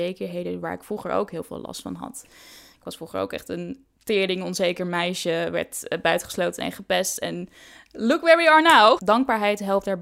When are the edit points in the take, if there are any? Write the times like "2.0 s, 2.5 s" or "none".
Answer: 9.0 s